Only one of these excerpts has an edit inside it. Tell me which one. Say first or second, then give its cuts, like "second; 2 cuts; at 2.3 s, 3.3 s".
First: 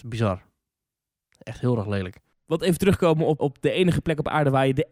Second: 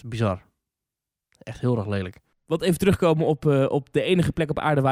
first; 1 cut; at 3.4 s